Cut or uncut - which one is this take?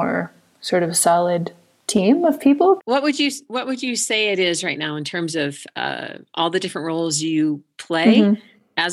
cut